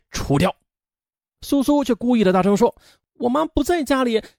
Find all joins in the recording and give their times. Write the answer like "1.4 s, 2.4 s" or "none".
1.3 s